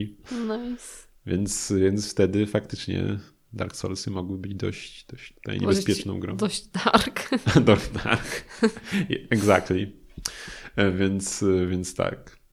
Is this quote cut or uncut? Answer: uncut